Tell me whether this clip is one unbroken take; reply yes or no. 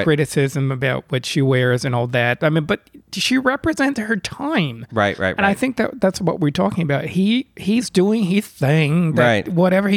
yes